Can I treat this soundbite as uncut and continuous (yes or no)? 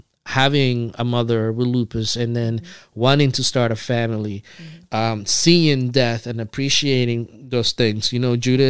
yes